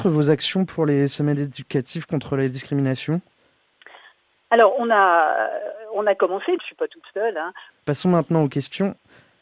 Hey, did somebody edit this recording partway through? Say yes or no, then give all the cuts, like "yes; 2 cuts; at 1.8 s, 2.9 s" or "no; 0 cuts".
yes; 2 cuts; at 6.6 s, 7.7 s